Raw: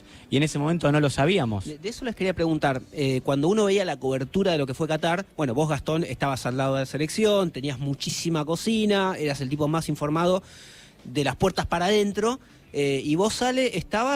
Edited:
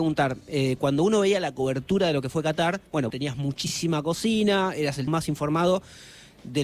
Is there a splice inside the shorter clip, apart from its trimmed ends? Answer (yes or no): yes